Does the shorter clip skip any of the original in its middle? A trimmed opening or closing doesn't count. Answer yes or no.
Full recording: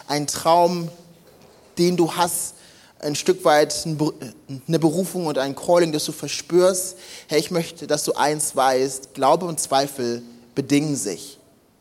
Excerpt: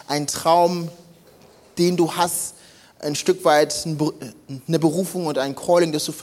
no